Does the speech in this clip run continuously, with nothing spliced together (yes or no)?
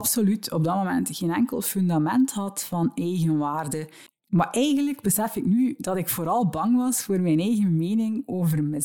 no